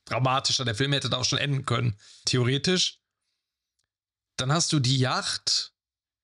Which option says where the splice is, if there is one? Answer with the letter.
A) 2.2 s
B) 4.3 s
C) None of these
A